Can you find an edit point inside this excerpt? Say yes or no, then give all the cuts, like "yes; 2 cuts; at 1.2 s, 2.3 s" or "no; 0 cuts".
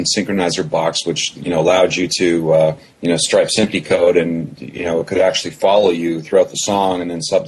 no; 0 cuts